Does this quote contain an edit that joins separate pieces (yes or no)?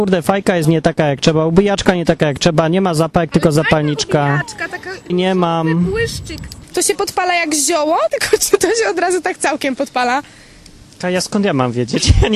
yes